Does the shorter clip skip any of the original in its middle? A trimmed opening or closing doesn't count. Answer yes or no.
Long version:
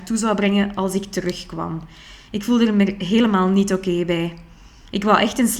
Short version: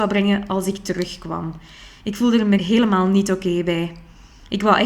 yes